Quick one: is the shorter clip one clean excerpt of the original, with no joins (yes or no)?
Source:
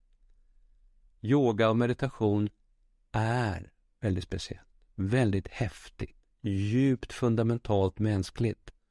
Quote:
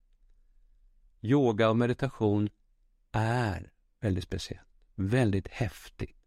yes